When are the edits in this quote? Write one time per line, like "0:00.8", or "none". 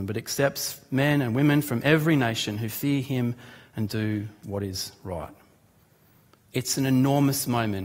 none